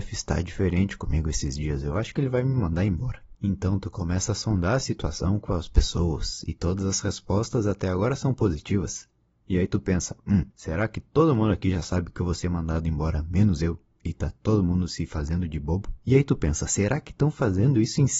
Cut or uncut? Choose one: cut